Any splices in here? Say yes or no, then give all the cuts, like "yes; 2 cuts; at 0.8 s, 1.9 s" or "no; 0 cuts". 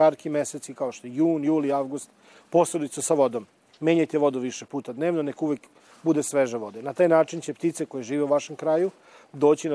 no; 0 cuts